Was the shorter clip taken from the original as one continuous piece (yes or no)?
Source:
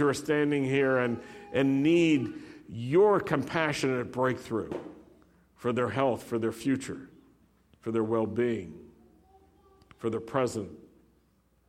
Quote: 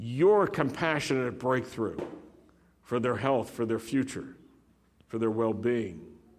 yes